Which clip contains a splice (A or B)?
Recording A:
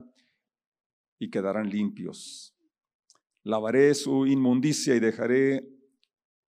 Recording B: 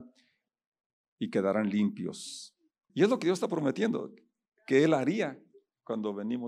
B